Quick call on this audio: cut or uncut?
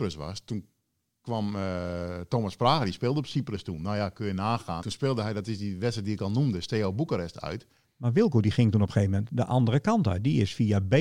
cut